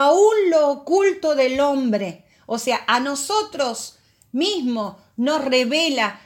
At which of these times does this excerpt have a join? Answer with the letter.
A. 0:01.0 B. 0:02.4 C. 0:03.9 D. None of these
D